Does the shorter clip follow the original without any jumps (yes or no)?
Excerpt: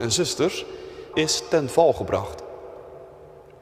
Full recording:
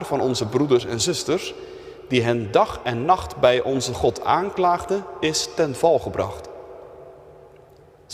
no